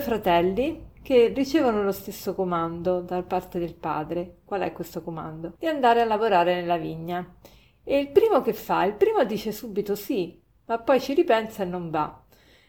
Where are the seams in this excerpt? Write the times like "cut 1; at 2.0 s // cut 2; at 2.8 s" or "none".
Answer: cut 1; at 5.5 s